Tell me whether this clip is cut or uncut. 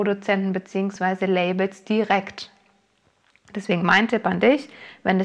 uncut